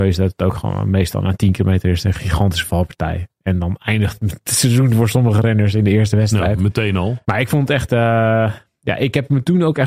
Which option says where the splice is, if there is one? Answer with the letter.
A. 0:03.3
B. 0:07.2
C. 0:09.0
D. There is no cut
B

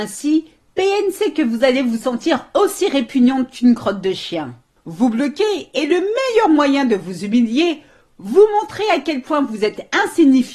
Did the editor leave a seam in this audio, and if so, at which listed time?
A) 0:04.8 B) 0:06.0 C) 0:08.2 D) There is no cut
A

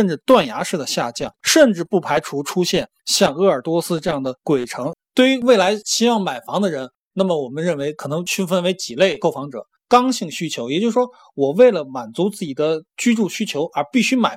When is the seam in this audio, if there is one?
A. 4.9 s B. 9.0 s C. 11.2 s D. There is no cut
A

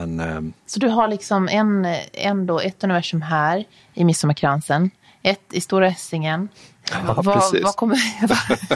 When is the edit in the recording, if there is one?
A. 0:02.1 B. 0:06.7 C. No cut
C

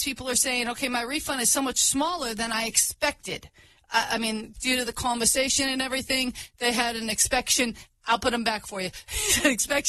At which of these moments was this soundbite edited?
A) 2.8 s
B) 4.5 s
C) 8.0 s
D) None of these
B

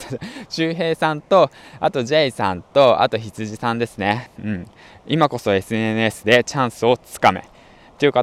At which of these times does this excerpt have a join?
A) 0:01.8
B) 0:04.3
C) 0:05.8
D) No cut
B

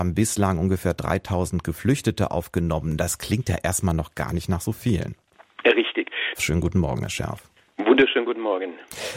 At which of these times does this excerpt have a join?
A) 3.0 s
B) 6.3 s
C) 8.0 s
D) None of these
B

